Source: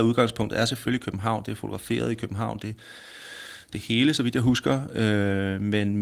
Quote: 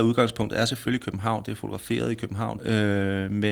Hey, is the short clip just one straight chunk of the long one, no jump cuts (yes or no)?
no